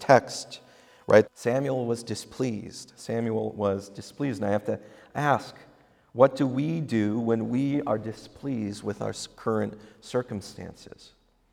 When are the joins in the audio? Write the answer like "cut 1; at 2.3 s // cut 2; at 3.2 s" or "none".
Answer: cut 1; at 1.2 s